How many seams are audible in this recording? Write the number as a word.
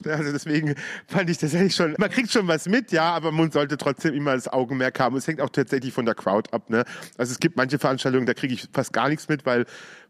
one